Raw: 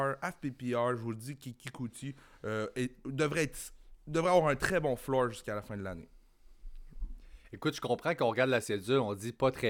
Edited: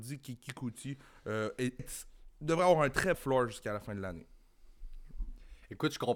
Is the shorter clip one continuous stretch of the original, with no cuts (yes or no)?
no